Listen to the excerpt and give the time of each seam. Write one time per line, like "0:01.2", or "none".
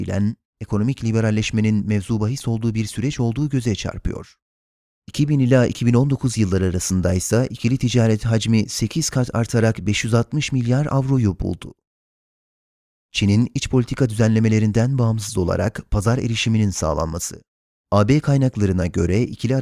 0:04.9
0:13.0
0:17.7